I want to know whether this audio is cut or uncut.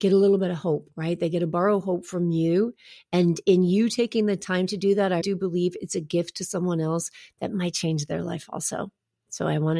cut